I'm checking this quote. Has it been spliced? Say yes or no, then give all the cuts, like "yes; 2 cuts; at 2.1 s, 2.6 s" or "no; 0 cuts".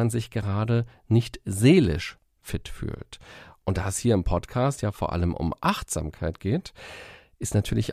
no; 0 cuts